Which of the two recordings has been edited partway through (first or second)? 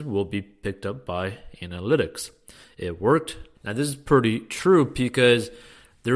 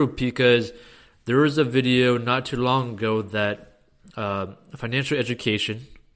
first